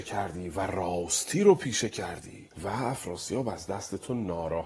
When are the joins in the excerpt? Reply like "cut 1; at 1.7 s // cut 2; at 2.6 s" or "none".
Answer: cut 1; at 2.5 s